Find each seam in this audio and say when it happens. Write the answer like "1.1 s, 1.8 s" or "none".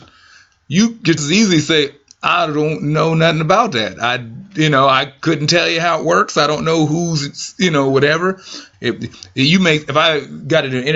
1.2 s, 8.7 s

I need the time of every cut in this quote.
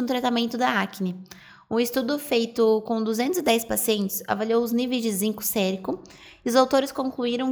none

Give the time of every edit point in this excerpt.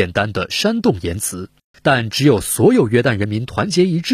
1.7 s

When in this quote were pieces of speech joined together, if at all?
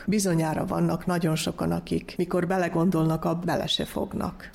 3.4 s

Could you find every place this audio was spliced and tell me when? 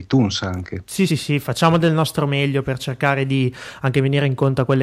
1.1 s

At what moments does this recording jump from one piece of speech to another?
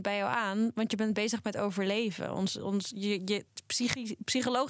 none

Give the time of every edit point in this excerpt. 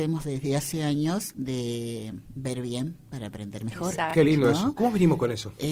none

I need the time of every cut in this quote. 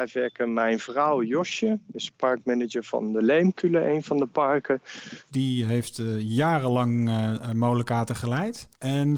5.3 s

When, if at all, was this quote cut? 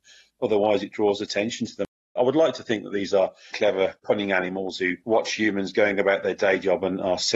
2.2 s, 3.5 s, 5.0 s

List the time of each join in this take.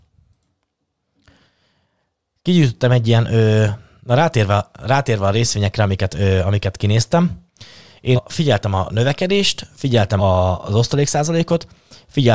8.2 s, 10.2 s

